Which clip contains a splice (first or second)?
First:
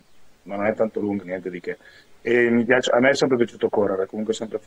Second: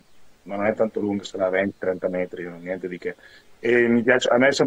first